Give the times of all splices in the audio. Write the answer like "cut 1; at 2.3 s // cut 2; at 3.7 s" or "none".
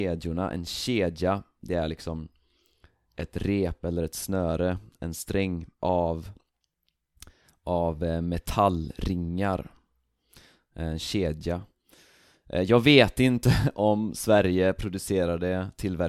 none